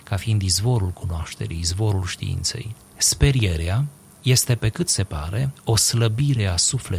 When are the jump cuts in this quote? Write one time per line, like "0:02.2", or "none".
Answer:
0:02.7